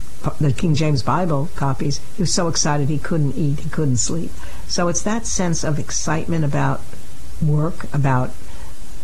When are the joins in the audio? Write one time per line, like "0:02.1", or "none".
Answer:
none